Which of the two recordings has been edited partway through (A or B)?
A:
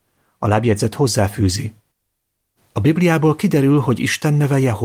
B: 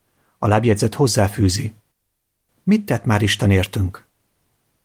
B